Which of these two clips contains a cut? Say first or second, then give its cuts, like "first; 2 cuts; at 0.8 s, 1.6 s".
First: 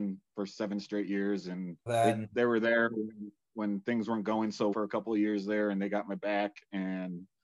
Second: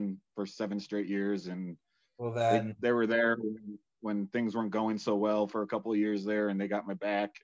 first; 2 cuts; at 1.9 s, 4.7 s